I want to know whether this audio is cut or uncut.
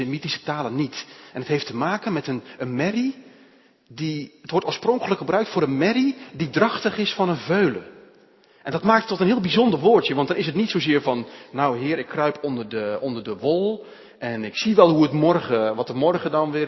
uncut